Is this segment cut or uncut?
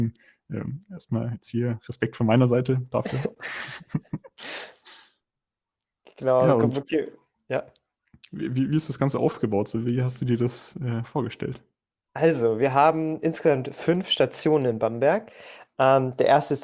uncut